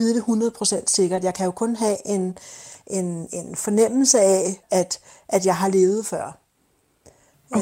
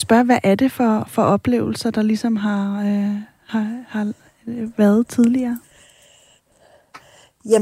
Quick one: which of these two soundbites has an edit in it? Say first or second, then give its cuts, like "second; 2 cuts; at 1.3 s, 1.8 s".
first; 1 cut; at 4.6 s